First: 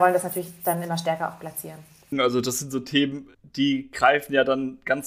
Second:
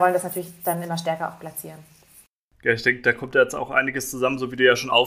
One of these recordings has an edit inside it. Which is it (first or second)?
first